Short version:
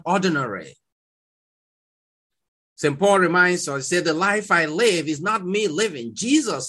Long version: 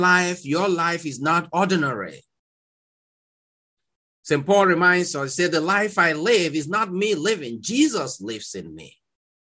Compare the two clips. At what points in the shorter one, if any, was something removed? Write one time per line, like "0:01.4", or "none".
none